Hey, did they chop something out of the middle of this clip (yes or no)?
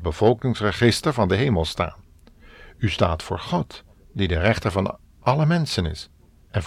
no